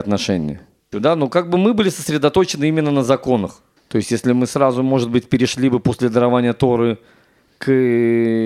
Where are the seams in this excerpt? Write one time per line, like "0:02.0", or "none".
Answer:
0:00.9
0:03.8